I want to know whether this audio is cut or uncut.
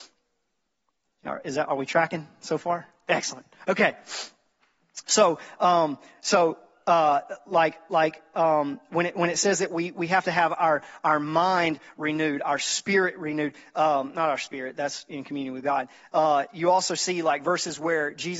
uncut